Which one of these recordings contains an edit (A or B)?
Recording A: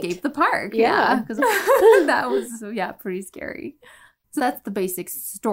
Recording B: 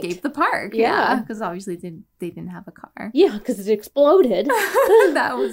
A